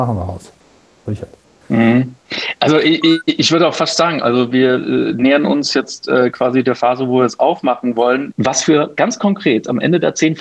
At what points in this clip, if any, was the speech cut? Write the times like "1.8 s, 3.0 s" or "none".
8.3 s